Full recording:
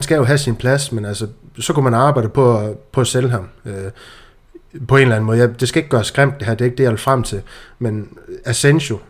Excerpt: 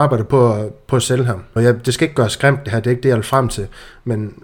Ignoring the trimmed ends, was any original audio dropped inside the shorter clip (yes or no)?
yes